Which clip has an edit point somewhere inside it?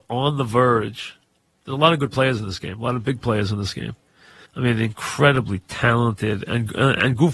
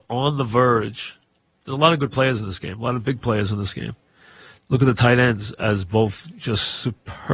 first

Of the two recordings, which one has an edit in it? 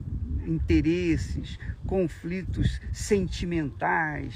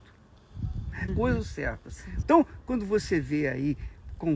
second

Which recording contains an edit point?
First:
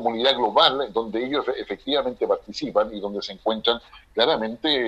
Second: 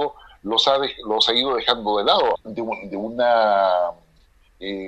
second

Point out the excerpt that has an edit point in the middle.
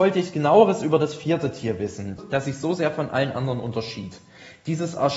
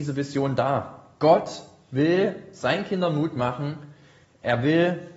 first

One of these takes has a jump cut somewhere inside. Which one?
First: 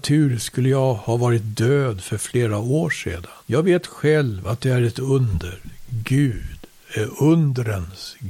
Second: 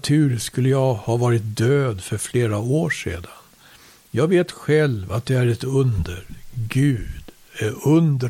first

